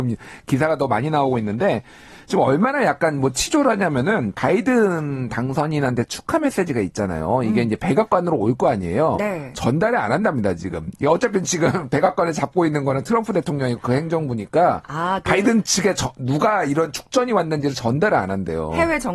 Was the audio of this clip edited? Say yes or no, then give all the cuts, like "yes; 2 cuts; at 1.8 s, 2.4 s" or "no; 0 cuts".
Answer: no; 0 cuts